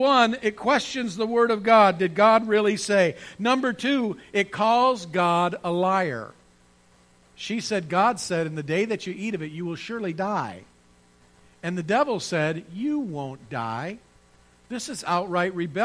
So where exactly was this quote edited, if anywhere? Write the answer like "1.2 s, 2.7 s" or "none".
7.3 s